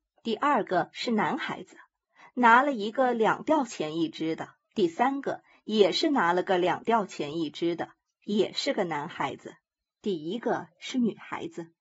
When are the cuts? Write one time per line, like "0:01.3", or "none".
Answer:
0:04.6
0:09.8